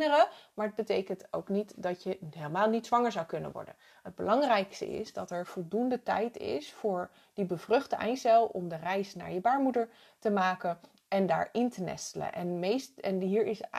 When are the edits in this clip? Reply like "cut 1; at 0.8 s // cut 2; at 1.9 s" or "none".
none